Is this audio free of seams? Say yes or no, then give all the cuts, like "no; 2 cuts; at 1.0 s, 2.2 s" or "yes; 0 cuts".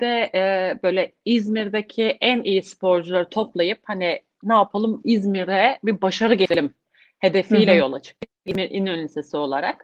yes; 0 cuts